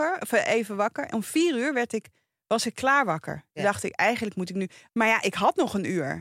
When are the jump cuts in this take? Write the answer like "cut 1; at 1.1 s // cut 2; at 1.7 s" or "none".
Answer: cut 1; at 4.9 s